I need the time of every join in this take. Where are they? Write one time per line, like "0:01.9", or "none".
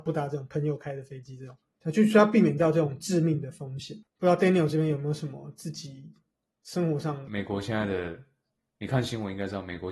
0:04.0
0:07.3